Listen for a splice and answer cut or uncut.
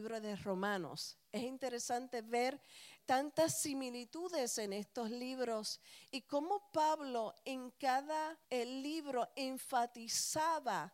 cut